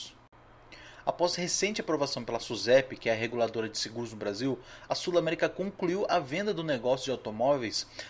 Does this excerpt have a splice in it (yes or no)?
yes